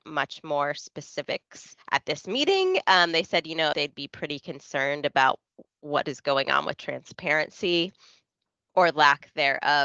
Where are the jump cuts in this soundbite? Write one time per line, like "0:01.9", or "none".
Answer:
0:01.8
0:03.7